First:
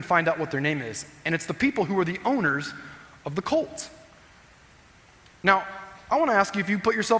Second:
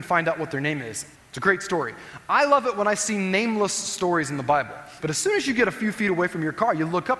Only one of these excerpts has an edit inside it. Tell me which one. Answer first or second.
second